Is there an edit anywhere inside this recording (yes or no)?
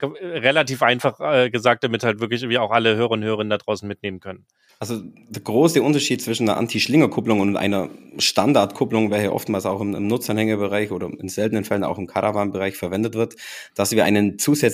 no